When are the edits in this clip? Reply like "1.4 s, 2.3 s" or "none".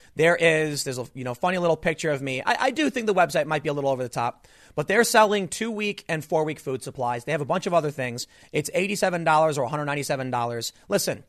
none

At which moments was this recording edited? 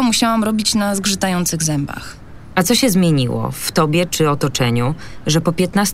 none

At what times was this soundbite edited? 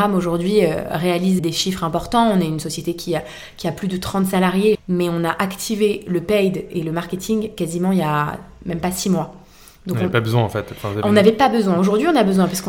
1.4 s, 4.7 s

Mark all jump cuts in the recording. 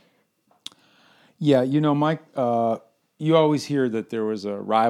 none

